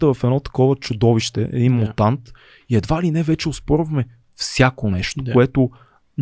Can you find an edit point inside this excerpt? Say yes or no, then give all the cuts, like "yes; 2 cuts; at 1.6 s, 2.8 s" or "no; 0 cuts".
no; 0 cuts